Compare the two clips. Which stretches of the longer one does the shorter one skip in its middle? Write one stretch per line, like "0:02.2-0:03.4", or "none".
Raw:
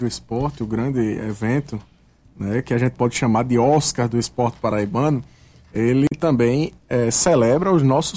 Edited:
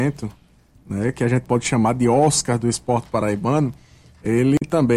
none

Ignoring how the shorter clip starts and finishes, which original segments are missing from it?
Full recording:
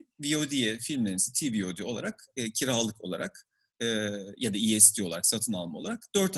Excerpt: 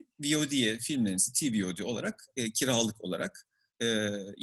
none

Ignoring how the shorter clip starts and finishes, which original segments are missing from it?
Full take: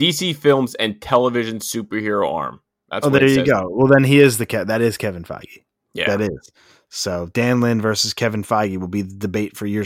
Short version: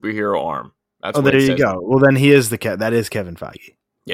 none

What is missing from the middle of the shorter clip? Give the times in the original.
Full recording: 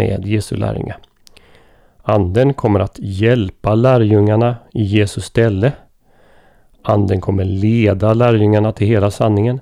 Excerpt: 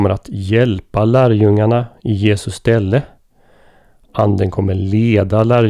none

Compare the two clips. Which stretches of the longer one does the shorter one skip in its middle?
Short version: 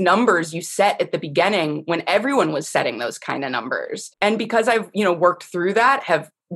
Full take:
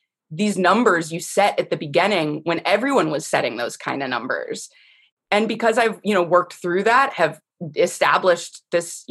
0:04.7-0:05.2

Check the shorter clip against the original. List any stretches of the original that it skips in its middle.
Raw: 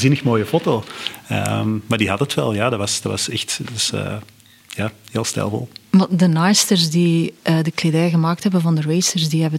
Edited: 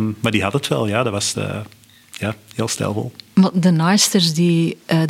0:03.0-0:03.9

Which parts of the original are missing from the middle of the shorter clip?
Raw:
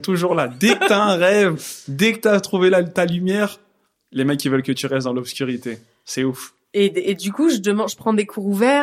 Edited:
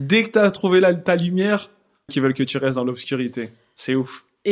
0:04.0-0:04.4

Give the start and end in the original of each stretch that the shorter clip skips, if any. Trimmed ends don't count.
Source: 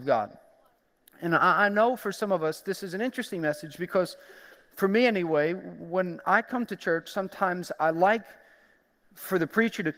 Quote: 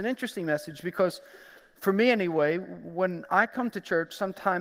none

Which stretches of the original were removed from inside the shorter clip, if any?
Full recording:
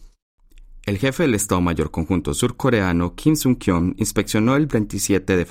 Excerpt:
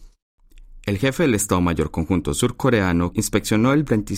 0:03.1-0:03.9

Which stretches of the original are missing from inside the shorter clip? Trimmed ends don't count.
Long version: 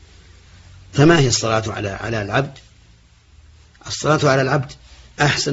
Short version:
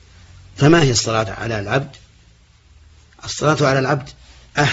0:01.6-0:01.9

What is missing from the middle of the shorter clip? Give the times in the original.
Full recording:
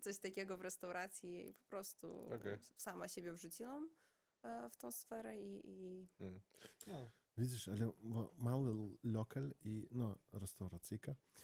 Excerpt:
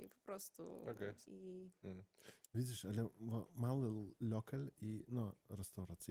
0:02.7-0:05.6
0:06.8-0:07.3

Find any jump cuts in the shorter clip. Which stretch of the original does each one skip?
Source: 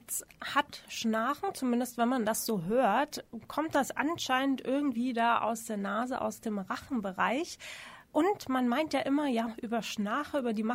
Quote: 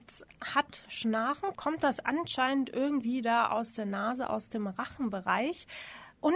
0:01.5-0:03.4

